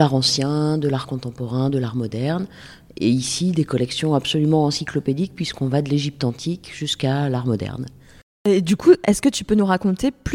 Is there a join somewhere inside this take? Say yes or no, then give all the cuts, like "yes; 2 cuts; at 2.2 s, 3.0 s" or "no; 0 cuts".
no; 0 cuts